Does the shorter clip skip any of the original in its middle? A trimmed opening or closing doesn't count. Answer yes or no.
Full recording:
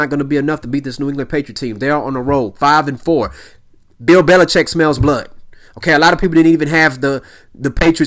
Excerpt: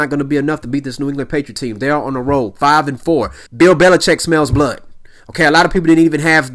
yes